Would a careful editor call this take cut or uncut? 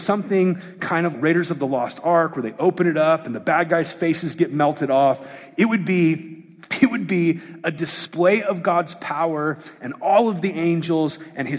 cut